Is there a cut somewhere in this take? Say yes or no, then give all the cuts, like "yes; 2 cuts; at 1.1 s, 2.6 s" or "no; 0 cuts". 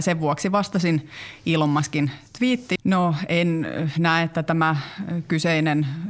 yes; 1 cut; at 2.8 s